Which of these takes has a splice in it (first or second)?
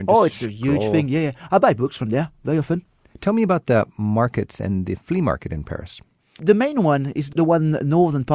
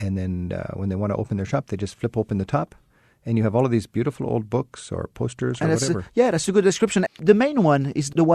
second